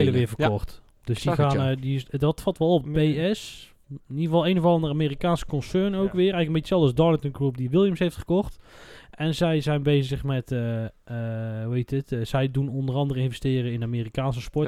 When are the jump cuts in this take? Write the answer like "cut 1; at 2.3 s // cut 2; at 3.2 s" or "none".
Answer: cut 1; at 2.8 s